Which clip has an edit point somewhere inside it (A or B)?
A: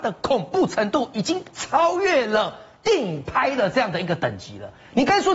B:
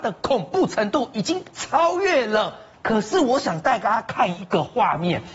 B